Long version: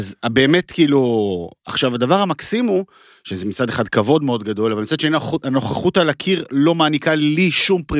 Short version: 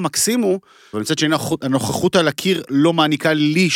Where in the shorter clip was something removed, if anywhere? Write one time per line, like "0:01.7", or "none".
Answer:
0:00.9

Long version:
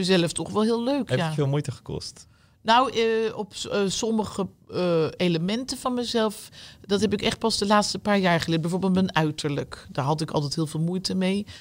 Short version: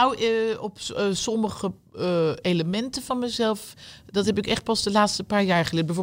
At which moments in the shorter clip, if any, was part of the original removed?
none

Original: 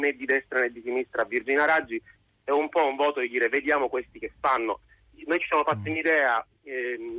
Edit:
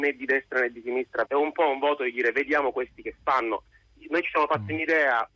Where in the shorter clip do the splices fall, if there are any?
0:01.2

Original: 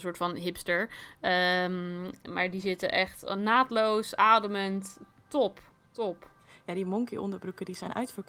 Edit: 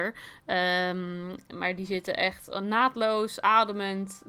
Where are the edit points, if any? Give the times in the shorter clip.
none

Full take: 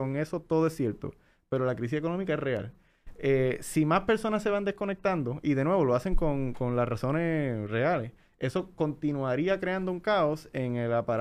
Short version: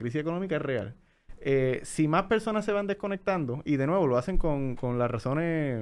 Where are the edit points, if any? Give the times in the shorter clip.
none

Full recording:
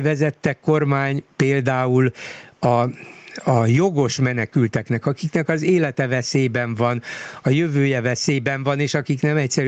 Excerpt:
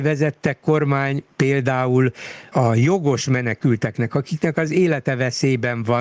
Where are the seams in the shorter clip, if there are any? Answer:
0:02.5

